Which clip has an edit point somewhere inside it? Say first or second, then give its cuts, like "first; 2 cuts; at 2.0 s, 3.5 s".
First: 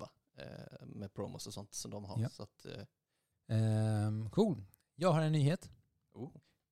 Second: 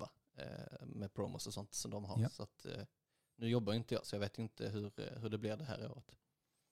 first; 1 cut; at 3.3 s